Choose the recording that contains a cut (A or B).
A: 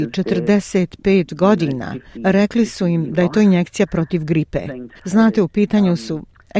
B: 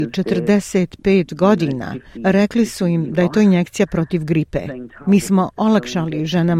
A